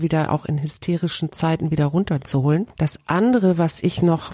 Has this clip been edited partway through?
no; 0 cuts

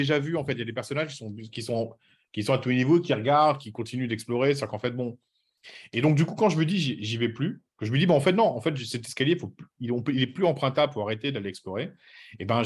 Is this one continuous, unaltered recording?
yes; 0 cuts

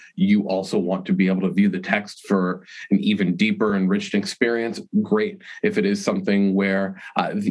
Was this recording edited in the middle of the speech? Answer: no; 0 cuts

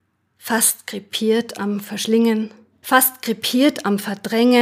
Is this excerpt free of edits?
no; 1 cut; at 2.8 s

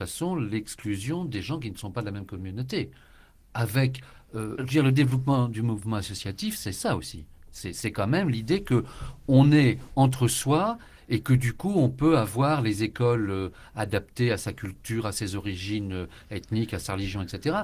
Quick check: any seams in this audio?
yes; 1 cut; at 4.6 s

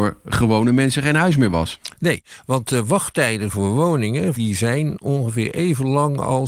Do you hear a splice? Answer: yes; 1 cut; at 4.4 s

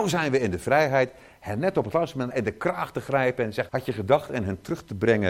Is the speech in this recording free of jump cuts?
no; 2 cuts; at 2.3 s, 3.7 s

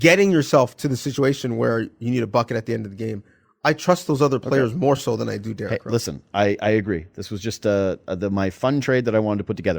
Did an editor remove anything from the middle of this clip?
no; 0 cuts

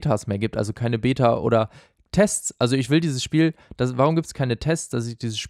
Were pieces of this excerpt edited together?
no; 0 cuts

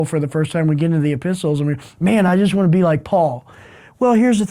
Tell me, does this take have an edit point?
no; 0 cuts

